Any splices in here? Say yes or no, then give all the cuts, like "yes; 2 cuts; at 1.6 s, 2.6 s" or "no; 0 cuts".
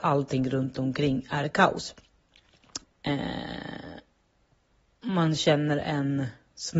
yes; 1 cut; at 2.8 s